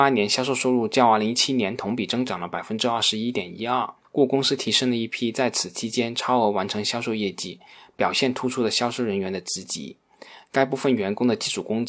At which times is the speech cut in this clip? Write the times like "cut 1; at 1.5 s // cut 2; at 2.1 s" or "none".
none